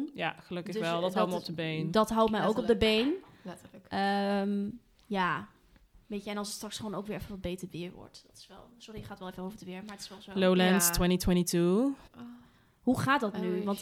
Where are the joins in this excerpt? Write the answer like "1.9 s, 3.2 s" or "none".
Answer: 12.1 s

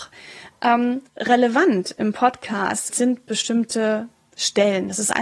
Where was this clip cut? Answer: 1.1 s, 2.9 s

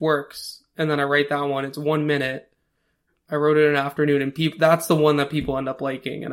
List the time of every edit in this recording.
none

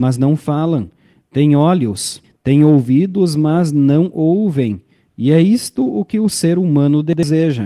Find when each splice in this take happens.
2.2 s, 5.1 s

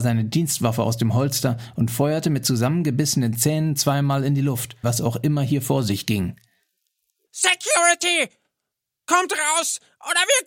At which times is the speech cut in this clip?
4.8 s, 7.3 s

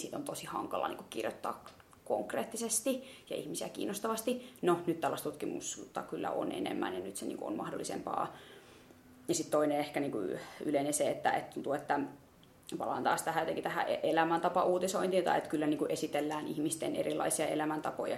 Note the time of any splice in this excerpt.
none

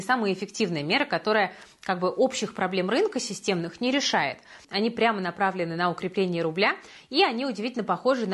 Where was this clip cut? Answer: 4.6 s

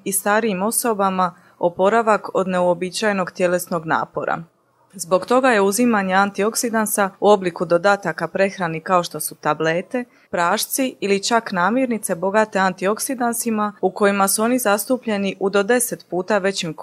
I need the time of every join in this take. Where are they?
10.3 s

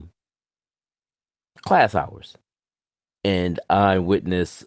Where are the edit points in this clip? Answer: none

